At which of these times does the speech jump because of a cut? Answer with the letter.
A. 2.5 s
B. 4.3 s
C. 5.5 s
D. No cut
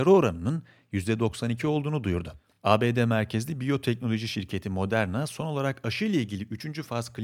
D